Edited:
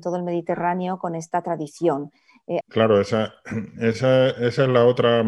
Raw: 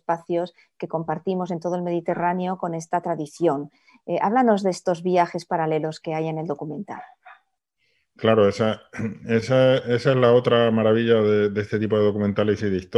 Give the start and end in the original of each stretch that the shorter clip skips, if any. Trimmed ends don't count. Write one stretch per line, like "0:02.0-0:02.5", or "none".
0:04.2-0:08.1